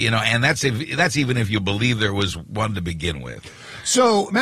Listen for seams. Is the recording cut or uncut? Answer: uncut